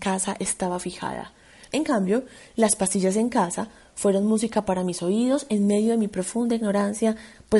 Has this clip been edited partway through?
yes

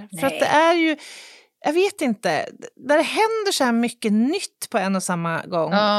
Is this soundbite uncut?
yes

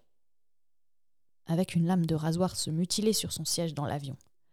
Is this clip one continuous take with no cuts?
no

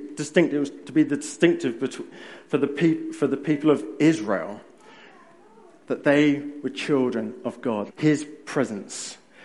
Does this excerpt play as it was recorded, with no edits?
no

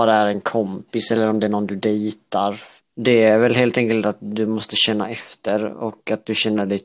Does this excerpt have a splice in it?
yes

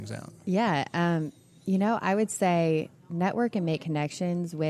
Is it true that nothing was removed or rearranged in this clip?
yes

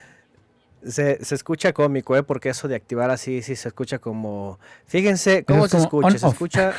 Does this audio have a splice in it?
no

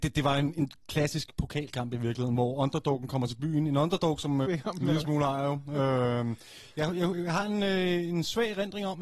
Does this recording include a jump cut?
yes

